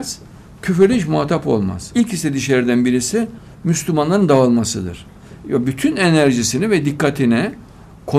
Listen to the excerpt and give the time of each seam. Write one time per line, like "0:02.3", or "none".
0:01.9
0:05.4

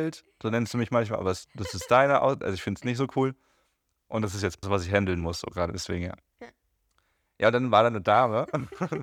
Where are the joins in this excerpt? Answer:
0:04.6

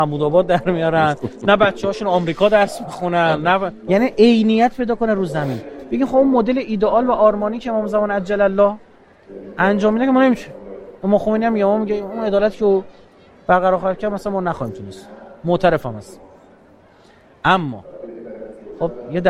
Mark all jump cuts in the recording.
0:03.9

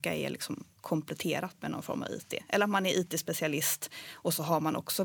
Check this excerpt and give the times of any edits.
none

